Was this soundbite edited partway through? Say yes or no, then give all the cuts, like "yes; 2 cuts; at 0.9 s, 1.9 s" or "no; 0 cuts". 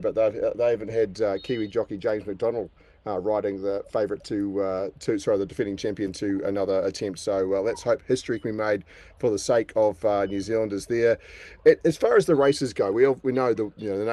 no; 0 cuts